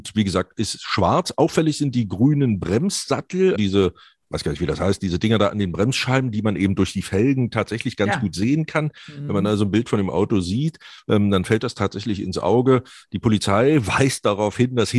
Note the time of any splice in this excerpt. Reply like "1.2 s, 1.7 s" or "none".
3.5 s